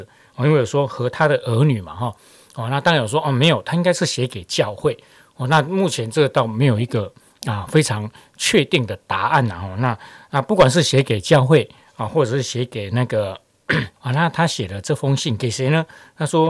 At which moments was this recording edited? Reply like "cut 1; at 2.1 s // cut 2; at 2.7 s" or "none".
cut 1; at 14.0 s